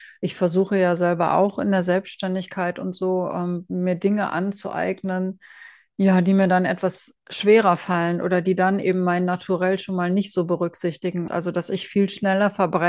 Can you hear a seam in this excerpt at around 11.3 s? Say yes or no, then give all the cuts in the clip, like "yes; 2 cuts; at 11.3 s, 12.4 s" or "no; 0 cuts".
yes; 1 cut; at 11.3 s